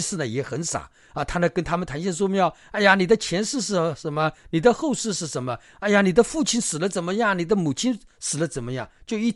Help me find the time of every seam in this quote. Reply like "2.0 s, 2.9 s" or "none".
none